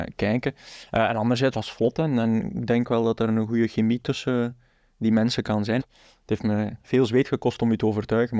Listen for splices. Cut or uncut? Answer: cut